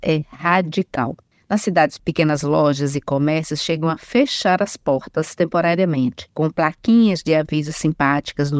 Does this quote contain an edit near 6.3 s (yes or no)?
no